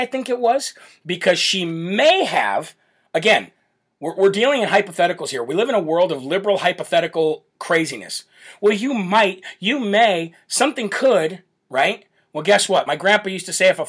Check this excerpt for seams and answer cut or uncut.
uncut